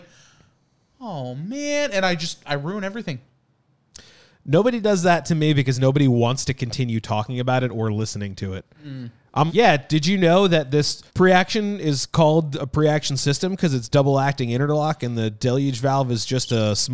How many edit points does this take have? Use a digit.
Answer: 2